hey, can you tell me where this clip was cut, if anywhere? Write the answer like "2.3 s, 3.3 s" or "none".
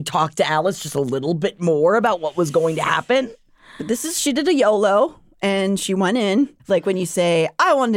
6.6 s